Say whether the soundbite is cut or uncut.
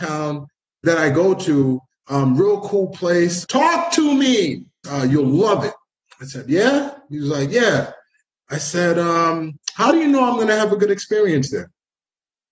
cut